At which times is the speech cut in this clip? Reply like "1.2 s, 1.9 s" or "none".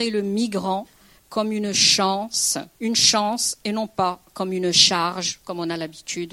2.7 s

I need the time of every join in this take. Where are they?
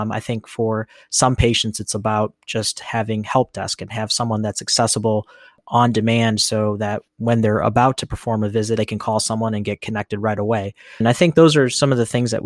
8.8 s, 11.0 s

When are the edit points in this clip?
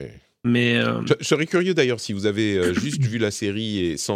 none

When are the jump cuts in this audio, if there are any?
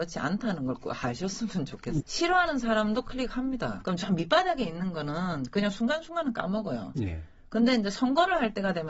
2.0 s, 3.8 s

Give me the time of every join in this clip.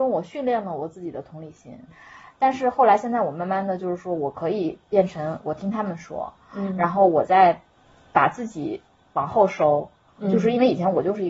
1.9 s

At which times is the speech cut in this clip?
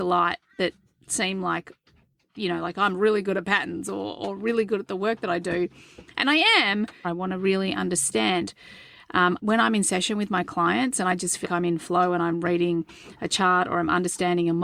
7.0 s, 9.4 s, 11.4 s

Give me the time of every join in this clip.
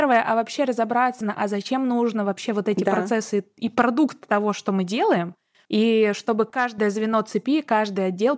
1.2 s, 5.6 s

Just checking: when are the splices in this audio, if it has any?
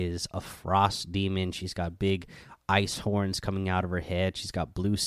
none

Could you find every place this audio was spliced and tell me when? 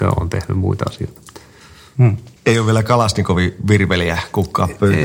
2.4 s

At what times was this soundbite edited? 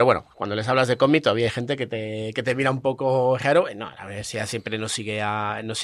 none

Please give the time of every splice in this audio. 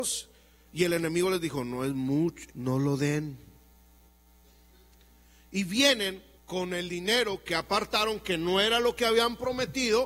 2.5 s, 6.3 s

